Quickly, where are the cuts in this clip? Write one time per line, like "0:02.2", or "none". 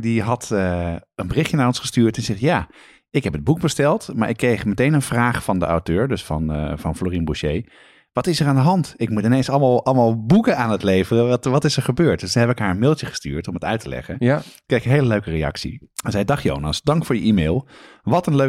0:15.9